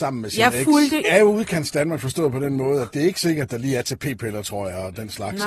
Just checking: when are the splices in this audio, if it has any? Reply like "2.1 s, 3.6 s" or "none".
1.0 s